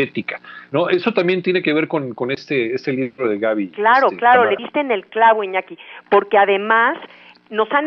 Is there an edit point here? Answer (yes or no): no